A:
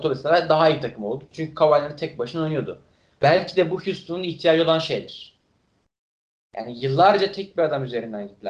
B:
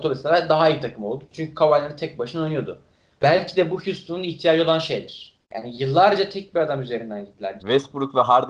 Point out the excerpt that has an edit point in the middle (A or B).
B